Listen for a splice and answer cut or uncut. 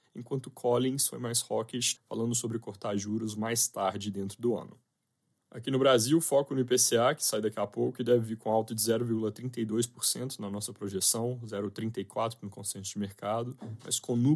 cut